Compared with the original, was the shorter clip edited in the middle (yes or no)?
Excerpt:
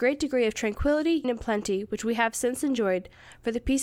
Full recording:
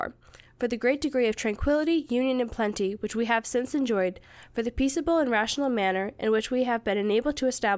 yes